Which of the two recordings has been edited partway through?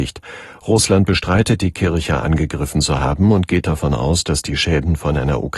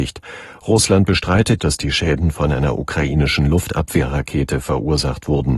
second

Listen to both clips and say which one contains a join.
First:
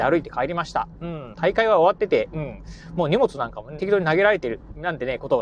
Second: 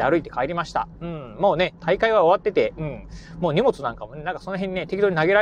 first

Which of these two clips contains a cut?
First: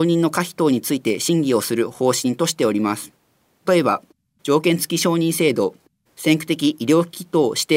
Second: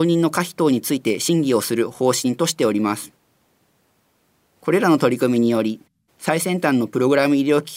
first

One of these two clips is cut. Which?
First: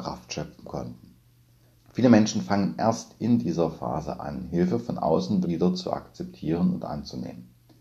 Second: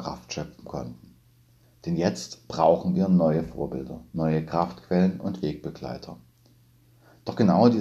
first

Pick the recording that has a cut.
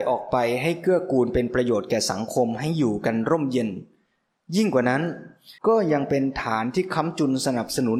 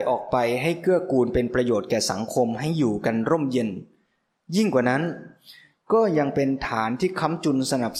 first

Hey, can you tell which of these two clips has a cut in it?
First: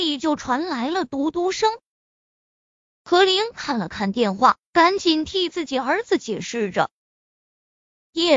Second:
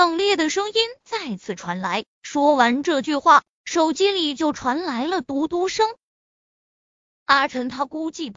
first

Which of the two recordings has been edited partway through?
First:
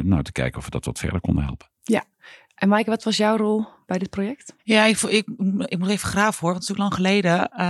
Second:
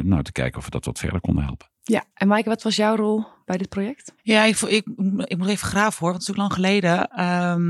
second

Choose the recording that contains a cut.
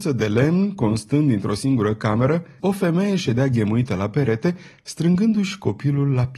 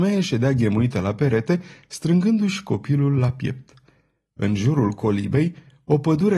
first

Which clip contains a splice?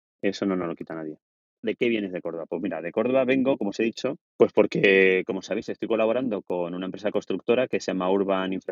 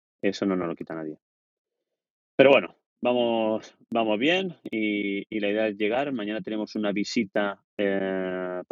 first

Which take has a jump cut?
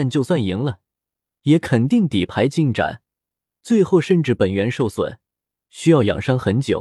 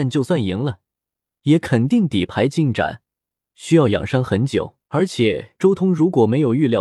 second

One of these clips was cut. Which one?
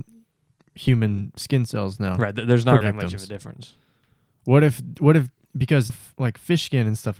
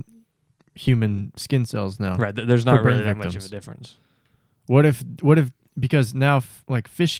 first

